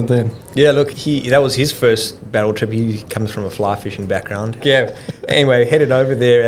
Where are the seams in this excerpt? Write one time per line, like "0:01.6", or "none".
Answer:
0:00.9
0:04.6